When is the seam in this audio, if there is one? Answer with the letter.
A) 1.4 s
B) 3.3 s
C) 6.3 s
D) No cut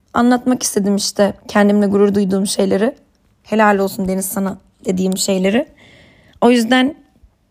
A